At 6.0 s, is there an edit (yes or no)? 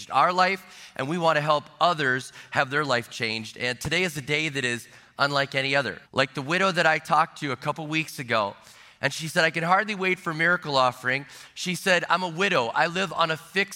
yes